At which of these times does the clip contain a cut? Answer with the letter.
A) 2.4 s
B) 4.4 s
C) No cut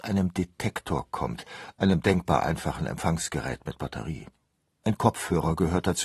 C